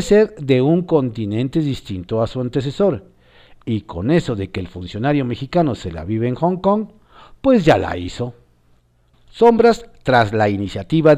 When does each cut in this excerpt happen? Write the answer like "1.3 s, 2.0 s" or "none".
9.1 s